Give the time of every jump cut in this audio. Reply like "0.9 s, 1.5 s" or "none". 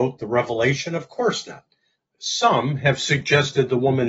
2.2 s